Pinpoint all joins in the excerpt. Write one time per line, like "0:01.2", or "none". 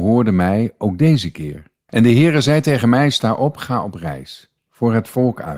0:01.9

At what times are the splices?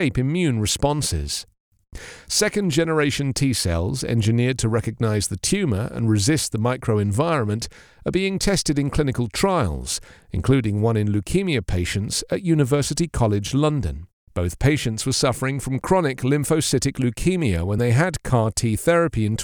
0:14.2

